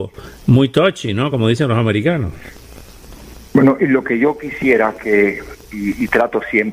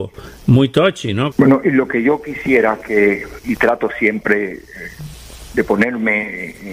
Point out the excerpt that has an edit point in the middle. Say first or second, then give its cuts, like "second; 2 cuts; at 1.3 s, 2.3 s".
second; 2 cuts; at 1.3 s, 3.4 s